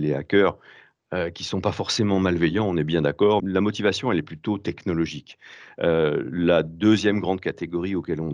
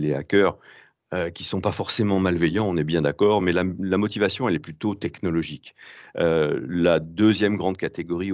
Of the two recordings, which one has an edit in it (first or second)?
first